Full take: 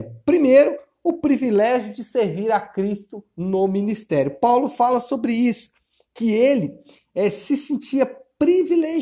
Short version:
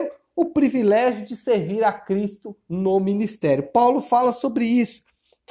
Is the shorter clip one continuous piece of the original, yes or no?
yes